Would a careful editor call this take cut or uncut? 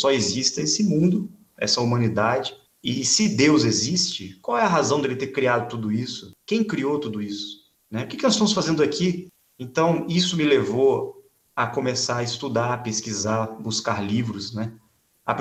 uncut